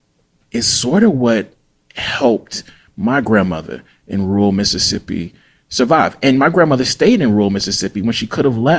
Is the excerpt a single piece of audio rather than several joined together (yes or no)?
yes